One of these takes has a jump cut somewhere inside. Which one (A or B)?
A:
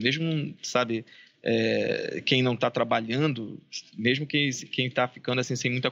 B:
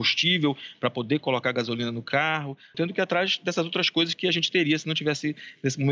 B